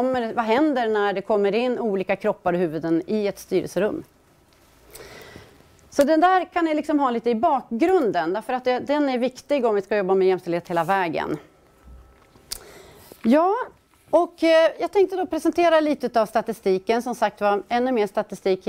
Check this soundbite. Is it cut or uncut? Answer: uncut